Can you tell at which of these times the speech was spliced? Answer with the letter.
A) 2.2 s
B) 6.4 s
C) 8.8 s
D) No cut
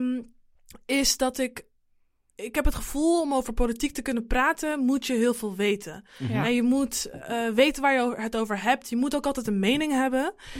D